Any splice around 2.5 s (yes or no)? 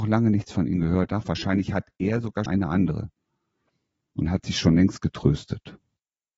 yes